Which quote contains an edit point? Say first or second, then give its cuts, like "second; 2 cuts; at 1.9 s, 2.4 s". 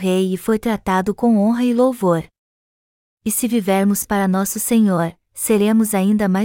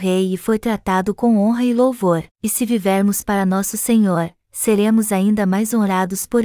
second; 1 cut; at 2.3 s